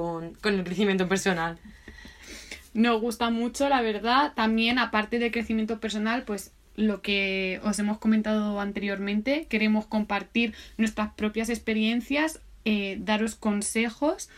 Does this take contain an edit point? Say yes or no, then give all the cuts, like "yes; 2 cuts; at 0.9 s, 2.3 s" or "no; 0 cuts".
no; 0 cuts